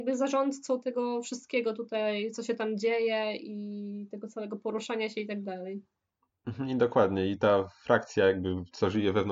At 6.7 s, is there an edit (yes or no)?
no